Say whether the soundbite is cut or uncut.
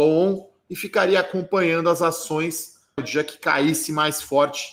cut